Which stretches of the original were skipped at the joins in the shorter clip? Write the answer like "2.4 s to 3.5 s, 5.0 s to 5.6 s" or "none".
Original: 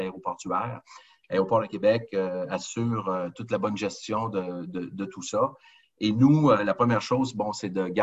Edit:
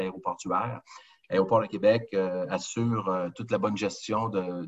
none